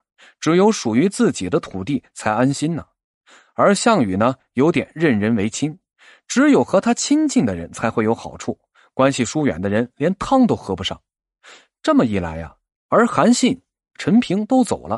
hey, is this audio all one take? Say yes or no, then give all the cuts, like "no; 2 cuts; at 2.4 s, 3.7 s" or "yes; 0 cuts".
no; 1 cut; at 12.8 s